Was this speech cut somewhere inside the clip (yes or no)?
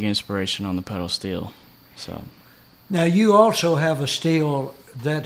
no